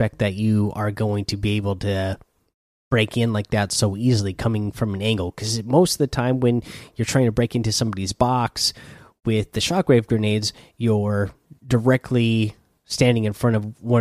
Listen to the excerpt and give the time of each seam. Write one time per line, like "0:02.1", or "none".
none